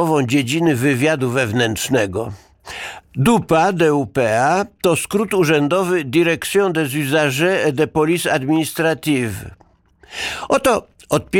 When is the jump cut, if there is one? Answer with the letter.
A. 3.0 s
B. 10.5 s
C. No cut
A